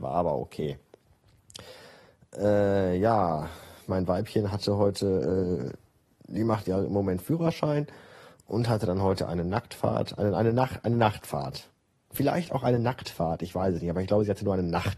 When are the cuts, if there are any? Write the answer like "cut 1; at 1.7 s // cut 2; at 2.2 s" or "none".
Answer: none